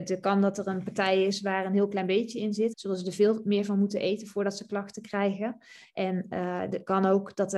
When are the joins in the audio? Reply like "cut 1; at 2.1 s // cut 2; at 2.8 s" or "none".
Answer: cut 1; at 2.7 s